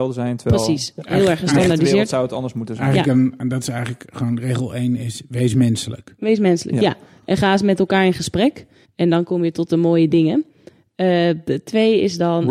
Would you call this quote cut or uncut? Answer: cut